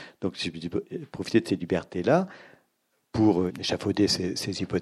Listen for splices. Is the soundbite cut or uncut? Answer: cut